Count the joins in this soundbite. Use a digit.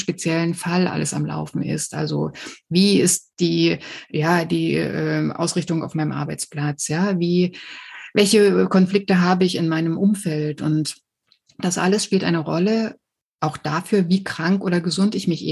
0